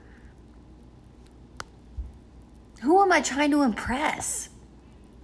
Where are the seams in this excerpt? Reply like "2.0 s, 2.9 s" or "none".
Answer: none